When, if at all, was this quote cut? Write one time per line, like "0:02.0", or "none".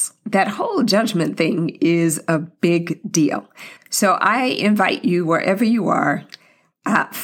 0:03.8